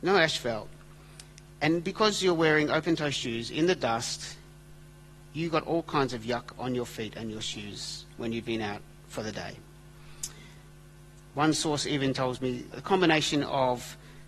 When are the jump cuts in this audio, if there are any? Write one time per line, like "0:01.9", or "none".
0:12.7

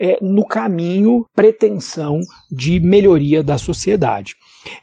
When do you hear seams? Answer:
0:01.3

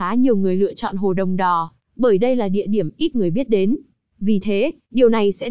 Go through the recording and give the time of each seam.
0:04.1

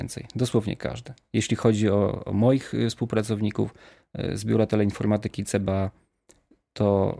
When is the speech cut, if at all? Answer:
none

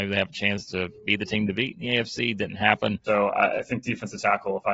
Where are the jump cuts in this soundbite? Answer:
0:03.1

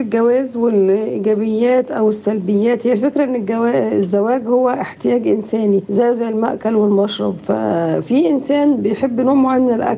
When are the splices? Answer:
none

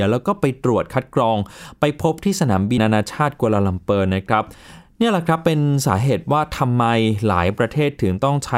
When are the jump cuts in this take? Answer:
0:02.8

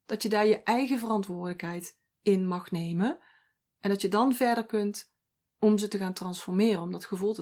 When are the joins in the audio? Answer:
none

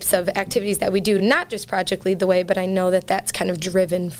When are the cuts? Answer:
none

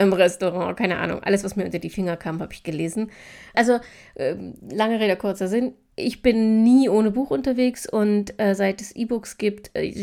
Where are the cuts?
0:03.5

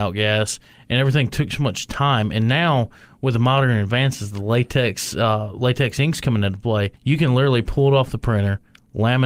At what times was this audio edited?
none

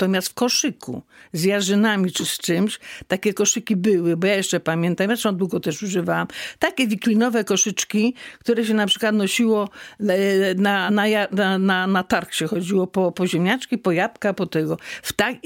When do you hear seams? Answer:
none

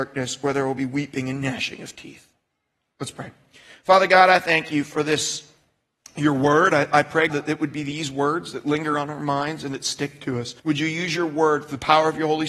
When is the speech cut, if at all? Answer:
0:07.3
0:10.6

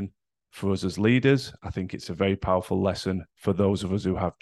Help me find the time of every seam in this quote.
none

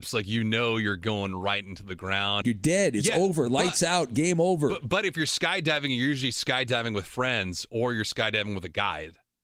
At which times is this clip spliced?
0:02.4

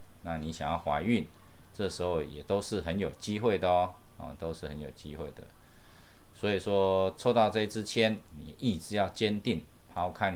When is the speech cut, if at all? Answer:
0:08.3

